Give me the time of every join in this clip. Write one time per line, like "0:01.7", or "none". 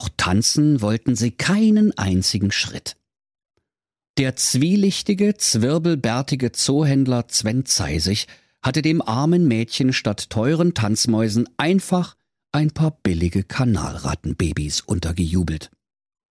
0:04.1